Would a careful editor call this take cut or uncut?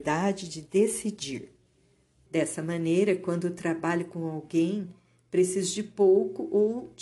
cut